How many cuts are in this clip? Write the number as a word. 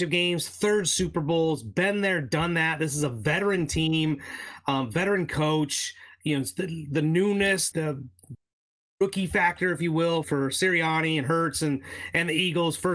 two